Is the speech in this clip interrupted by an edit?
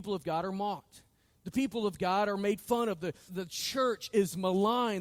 yes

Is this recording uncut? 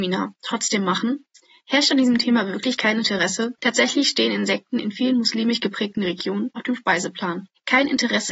no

